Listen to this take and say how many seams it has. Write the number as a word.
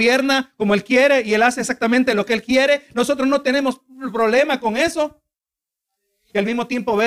zero